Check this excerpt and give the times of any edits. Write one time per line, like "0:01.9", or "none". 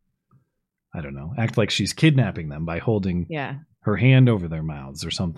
none

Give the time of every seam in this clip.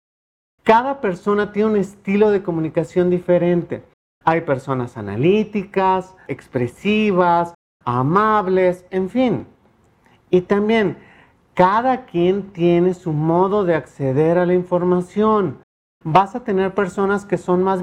0:06.3

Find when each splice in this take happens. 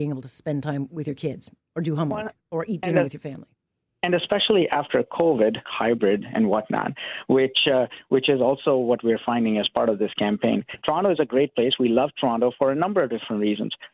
0:05.6
0:10.8

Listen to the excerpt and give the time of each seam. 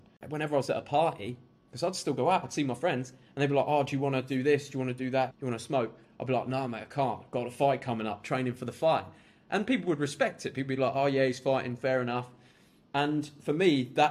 0:05.3

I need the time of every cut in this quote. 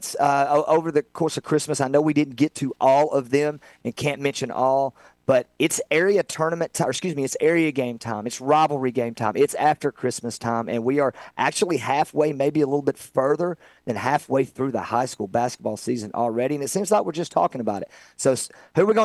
none

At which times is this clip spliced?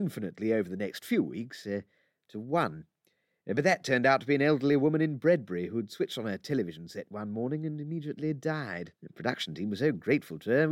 0:09.0

